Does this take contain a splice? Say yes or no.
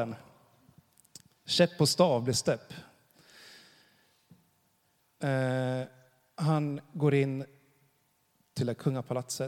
yes